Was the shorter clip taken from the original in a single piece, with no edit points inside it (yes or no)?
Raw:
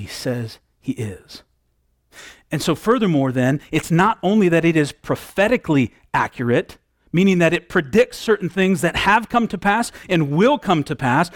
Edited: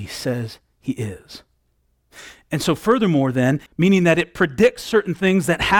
no